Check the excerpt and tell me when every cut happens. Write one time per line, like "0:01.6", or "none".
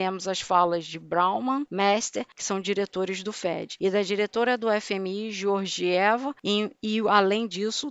none